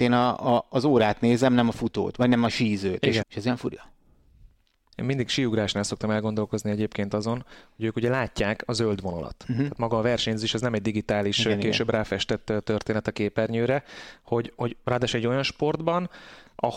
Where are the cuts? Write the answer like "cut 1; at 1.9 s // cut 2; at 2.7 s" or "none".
cut 1; at 3.2 s